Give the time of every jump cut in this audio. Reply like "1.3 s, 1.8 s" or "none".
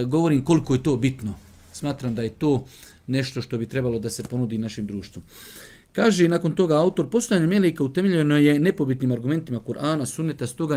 none